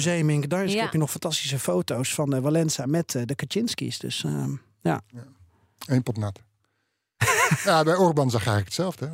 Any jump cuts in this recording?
no; 0 cuts

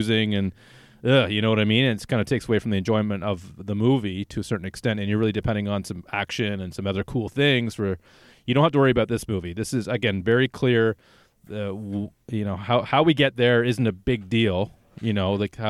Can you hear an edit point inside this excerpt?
no; 0 cuts

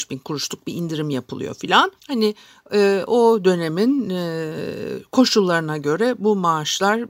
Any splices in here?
yes; 1 cut; at 2.0 s

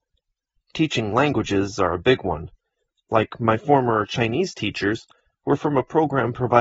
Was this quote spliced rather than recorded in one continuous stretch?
no; 0 cuts

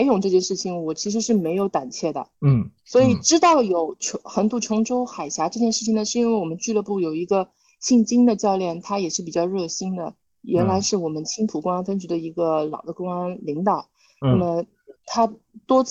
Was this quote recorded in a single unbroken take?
no; 1 cut; at 2.3 s

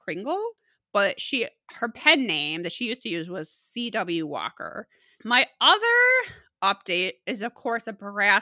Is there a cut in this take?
yes; 1 cut; at 5.2 s

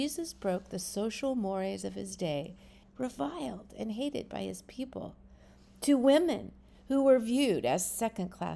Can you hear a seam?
yes; 1 cut; at 2.8 s

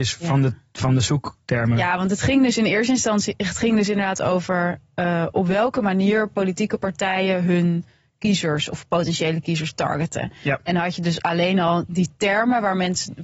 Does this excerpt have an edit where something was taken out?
no; 0 cuts

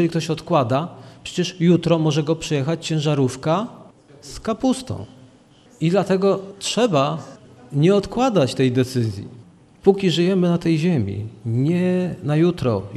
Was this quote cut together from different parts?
no; 0 cuts

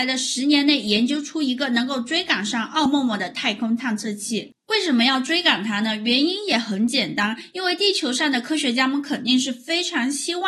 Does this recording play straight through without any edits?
yes; 0 cuts

